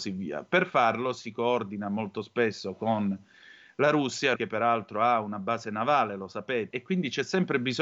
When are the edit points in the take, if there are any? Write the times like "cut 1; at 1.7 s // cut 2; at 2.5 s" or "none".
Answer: cut 1; at 4.4 s // cut 2; at 6.7 s